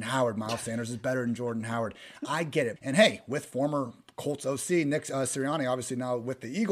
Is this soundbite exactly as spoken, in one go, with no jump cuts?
no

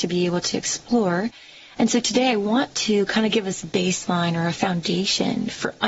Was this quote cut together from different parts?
no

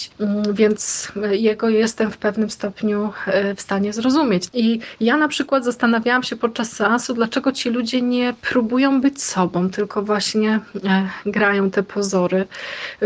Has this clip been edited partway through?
yes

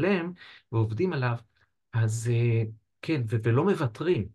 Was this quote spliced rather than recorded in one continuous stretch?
no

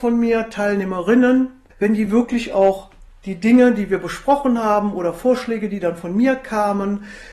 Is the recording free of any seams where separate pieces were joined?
yes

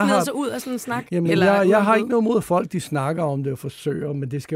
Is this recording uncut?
yes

